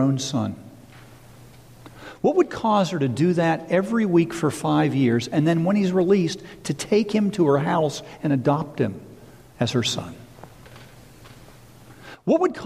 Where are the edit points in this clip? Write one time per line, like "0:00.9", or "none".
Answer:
none